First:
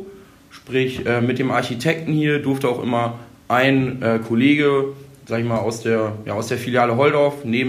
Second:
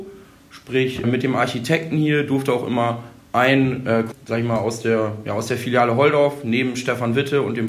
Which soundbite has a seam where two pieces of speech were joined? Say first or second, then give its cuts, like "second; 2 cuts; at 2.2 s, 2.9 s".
second; 2 cuts; at 1.0 s, 4.1 s